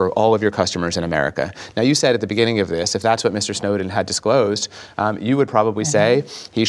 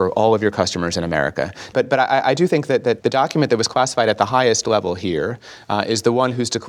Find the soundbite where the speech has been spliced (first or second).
second